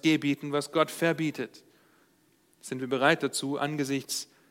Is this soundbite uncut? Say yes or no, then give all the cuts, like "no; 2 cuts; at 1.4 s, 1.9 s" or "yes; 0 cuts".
yes; 0 cuts